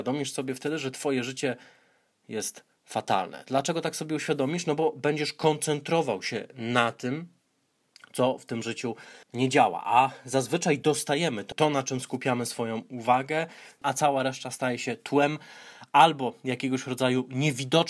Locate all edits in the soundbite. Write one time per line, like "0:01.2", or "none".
0:09.2
0:11.5
0:13.8